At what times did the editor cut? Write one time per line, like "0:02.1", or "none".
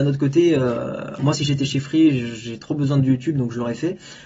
none